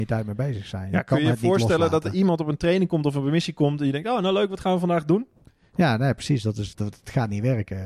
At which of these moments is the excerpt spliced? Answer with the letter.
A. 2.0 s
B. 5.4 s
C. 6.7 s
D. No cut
C